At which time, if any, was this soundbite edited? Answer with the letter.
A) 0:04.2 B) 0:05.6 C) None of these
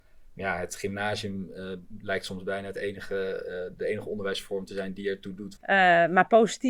B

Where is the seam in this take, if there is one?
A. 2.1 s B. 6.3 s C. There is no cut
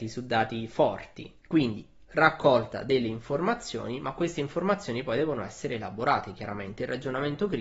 A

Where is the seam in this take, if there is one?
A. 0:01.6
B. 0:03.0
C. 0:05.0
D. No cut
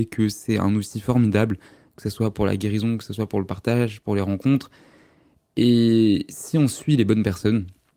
D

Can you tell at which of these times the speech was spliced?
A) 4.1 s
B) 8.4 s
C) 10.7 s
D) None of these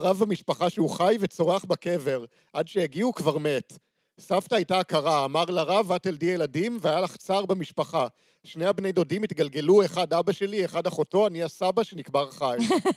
D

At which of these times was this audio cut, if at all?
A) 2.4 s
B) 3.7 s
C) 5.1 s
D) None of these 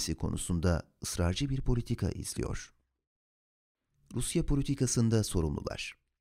D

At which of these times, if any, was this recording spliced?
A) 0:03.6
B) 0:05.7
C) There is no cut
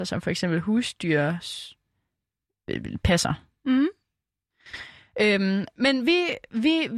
C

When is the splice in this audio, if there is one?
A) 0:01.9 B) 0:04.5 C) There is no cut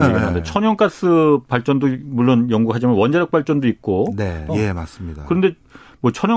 B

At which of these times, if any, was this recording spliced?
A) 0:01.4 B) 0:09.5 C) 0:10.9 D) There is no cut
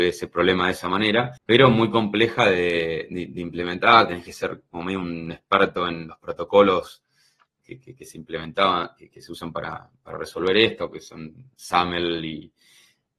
A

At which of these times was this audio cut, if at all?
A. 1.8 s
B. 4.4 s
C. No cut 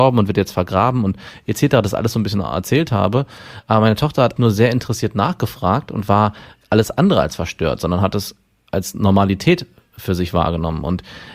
B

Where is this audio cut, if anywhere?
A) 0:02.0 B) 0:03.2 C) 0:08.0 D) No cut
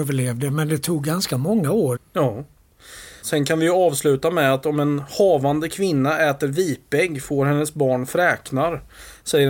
A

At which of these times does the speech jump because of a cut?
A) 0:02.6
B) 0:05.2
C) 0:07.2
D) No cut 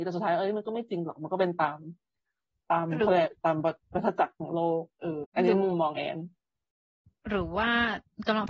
B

